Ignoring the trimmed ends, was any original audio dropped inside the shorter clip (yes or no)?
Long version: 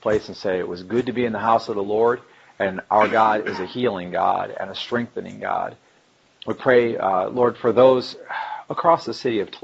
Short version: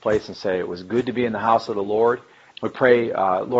yes